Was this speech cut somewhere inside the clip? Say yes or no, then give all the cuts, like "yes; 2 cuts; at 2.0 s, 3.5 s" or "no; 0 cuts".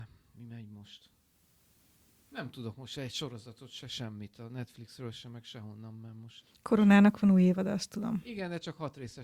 no; 0 cuts